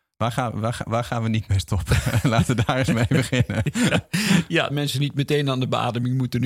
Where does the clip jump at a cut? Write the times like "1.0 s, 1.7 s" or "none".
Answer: 4.7 s